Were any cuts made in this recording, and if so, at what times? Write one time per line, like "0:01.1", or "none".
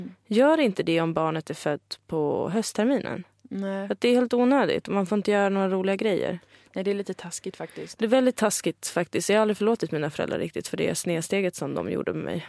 none